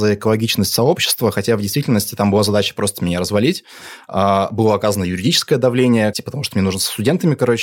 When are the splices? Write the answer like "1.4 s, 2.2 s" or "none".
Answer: 6.1 s